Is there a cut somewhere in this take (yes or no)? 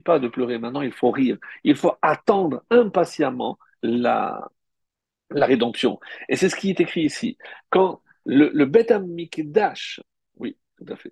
no